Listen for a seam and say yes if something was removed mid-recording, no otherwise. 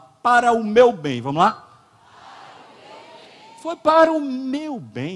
no